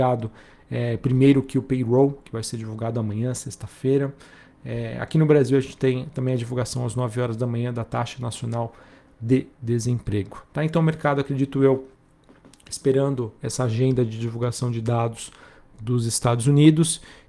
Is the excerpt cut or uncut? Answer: uncut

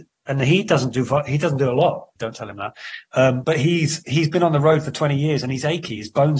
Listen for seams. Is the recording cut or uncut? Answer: cut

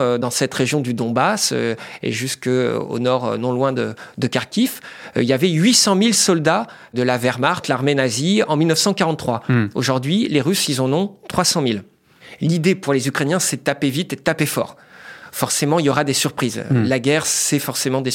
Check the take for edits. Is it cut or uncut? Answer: uncut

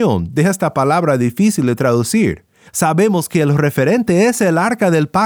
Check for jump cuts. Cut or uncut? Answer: cut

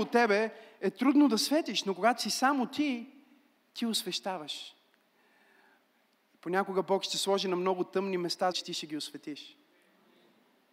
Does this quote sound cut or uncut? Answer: cut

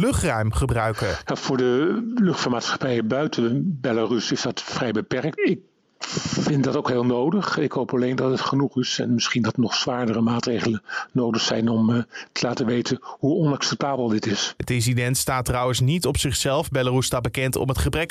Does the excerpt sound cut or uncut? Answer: cut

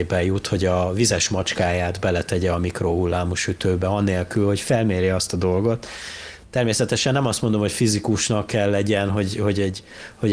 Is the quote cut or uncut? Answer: uncut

